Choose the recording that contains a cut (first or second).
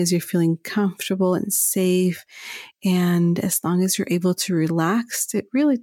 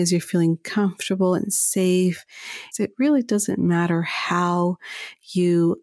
second